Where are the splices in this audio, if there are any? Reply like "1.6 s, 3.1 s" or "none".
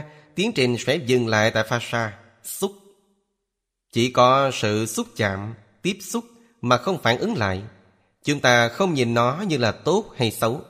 none